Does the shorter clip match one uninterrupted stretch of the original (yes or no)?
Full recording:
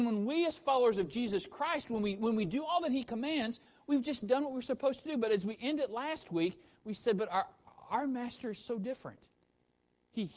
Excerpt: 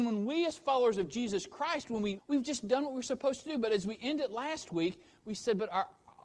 no